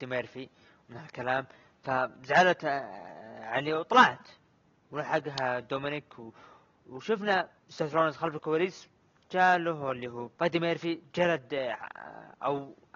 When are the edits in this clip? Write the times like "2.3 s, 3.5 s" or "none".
7.6 s, 10.3 s